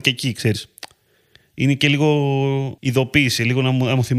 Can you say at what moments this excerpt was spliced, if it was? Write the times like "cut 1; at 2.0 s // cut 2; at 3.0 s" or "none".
cut 1; at 2.8 s

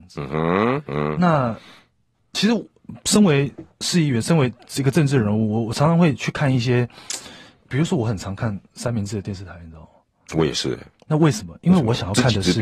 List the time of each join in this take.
cut 1; at 8.7 s

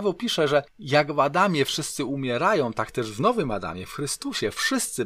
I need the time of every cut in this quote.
none

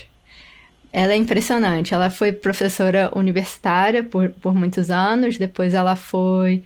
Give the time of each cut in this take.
none

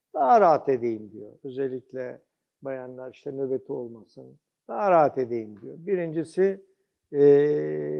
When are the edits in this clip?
cut 1; at 4.6 s

